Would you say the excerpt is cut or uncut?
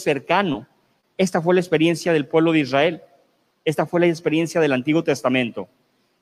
uncut